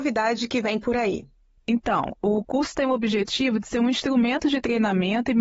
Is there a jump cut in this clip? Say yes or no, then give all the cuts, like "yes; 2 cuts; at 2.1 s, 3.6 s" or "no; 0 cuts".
yes; 1 cut; at 1.6 s